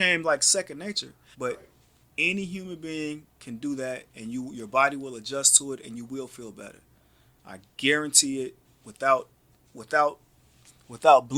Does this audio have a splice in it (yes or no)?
yes